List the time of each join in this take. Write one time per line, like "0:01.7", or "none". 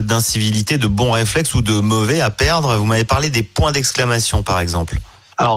none